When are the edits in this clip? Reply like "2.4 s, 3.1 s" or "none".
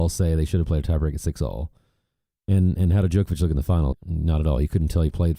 3.9 s